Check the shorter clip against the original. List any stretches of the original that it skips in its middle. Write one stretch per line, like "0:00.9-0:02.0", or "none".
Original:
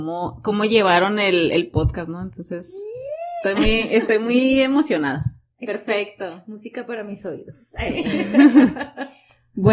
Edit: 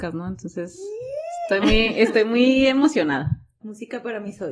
0:05.6-0:06.4